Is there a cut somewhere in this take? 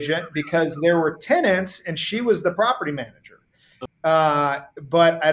yes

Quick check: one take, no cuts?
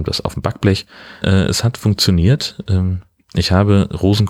no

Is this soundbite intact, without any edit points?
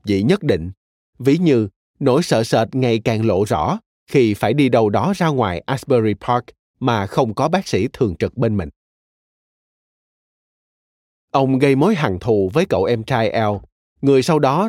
yes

